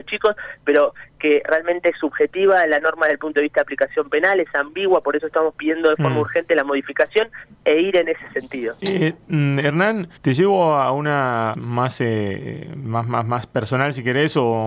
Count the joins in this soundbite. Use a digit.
3